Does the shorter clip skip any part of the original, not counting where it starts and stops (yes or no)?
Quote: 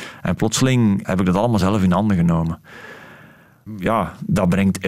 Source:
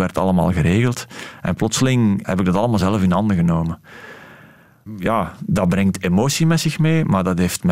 no